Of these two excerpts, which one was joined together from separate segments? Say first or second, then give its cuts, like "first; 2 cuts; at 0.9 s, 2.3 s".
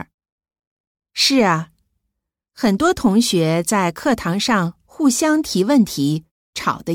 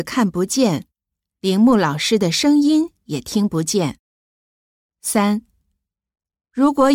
second; 1 cut; at 4.8 s